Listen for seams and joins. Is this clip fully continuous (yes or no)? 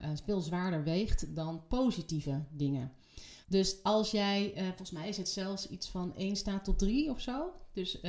no